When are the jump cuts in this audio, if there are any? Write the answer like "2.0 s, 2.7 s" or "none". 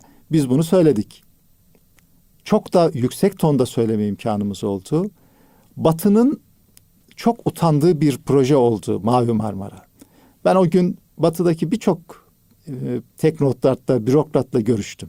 13.1 s